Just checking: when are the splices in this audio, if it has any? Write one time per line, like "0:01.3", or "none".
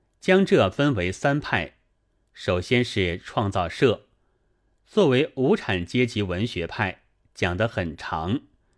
none